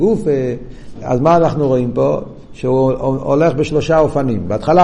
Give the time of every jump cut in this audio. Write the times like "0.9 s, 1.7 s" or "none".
1.0 s